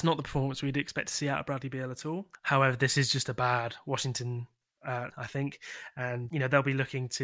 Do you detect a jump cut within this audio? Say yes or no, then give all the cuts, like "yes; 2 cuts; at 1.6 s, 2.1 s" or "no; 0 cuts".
yes; 3 cuts; at 2.3 s, 5.1 s, 6.3 s